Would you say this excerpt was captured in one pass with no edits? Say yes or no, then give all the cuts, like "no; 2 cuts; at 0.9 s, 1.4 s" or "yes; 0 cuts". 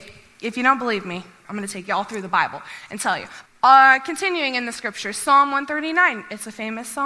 no; 2 cuts; at 1.4 s, 3.5 s